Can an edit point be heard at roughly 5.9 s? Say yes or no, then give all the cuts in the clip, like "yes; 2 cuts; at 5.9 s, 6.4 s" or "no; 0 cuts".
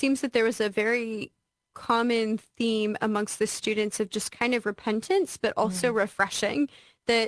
no; 0 cuts